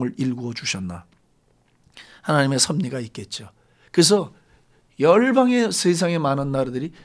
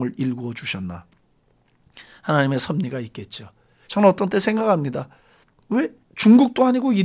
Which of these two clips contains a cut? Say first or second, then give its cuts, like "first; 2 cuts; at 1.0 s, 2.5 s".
second; 1 cut; at 3.9 s